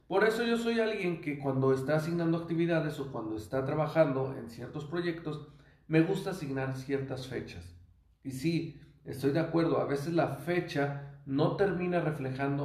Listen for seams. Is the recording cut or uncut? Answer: uncut